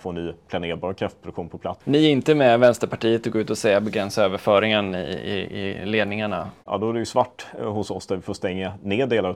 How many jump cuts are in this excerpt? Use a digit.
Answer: 2